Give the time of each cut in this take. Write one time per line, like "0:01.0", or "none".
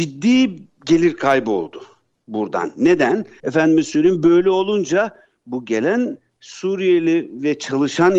0:03.4